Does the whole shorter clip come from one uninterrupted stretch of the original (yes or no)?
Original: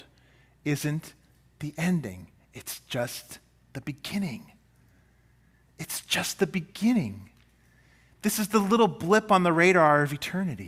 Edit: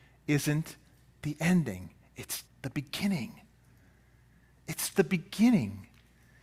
no